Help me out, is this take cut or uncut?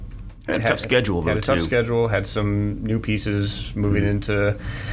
uncut